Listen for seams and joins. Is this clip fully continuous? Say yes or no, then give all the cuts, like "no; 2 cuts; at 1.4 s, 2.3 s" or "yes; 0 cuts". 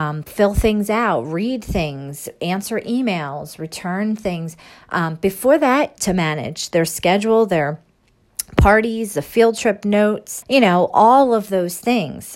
no; 2 cuts; at 6.0 s, 10.4 s